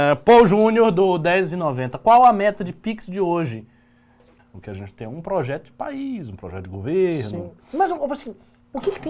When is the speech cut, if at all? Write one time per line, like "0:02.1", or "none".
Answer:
0:04.4